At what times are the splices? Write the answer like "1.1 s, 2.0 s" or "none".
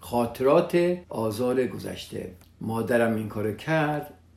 1.0 s